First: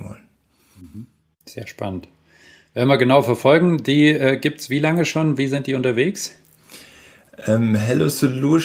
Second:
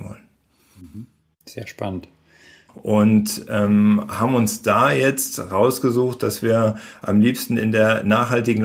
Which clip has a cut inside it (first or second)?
second